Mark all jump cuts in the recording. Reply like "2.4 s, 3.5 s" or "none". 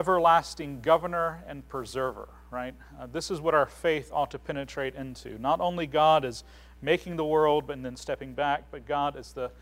none